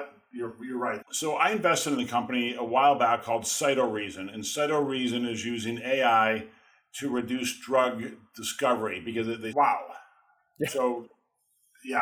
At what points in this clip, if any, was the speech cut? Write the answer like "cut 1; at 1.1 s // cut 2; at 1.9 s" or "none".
cut 1; at 1.0 s // cut 2; at 9.5 s